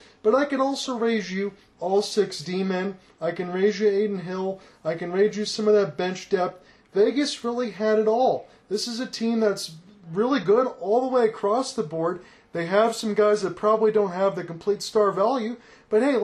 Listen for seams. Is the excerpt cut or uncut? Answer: uncut